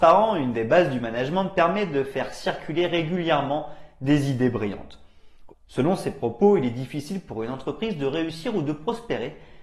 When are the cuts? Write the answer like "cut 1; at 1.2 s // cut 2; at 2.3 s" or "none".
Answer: cut 1; at 5.5 s